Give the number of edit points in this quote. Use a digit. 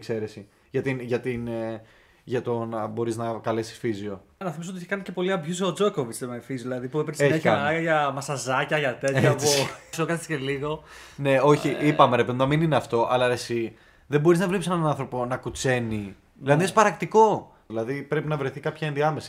3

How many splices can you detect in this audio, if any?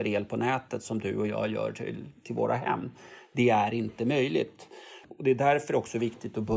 1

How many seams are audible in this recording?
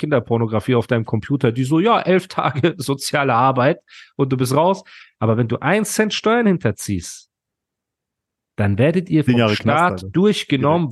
0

